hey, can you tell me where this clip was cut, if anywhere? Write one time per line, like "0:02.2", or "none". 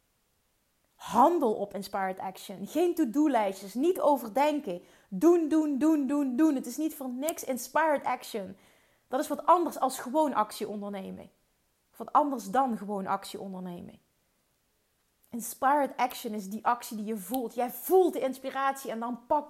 none